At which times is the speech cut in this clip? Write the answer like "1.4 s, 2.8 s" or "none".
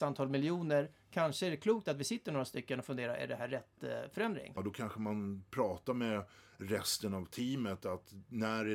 4.6 s